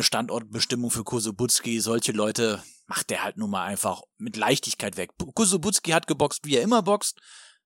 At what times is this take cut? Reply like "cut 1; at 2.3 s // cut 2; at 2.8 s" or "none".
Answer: none